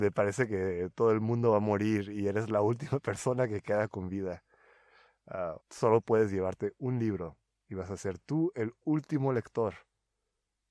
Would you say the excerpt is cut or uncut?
cut